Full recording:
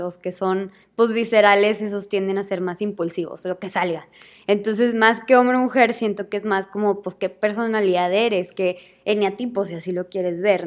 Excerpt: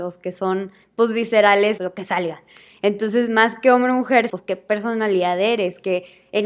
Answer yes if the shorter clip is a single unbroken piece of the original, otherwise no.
no